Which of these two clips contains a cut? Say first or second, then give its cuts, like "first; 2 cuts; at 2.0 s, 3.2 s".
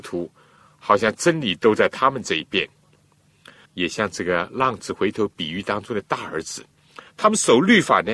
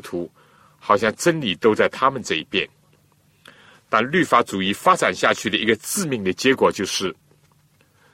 first; 2 cuts; at 3.6 s, 7.1 s